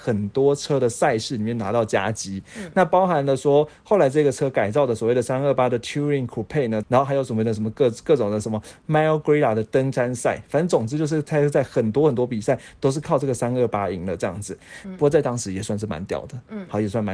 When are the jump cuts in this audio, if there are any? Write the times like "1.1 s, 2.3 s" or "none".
6.8 s, 14.8 s

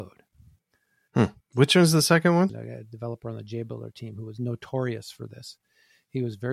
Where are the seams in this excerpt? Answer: 1.4 s, 2.5 s

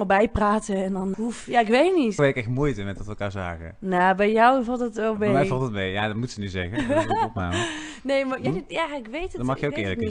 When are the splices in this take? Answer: 1.1 s, 2.2 s, 8.5 s

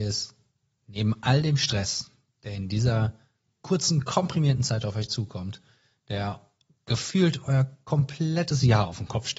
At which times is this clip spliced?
none

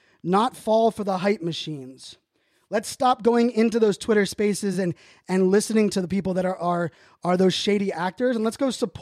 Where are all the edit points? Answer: none

